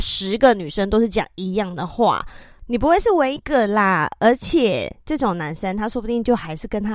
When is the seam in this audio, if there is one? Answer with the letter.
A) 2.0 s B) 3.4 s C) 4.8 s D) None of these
B